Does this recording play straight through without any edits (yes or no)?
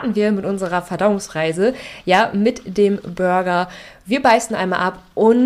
yes